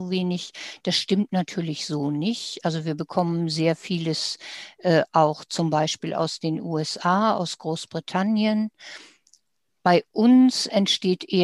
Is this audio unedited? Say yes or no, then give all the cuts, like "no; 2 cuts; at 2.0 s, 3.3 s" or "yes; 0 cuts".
yes; 0 cuts